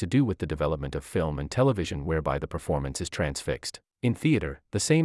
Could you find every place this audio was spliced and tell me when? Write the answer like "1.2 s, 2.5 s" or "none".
3.9 s